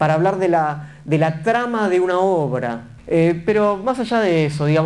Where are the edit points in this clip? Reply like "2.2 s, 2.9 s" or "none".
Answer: 3.0 s